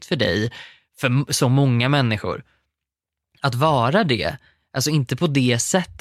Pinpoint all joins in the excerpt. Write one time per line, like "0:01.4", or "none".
none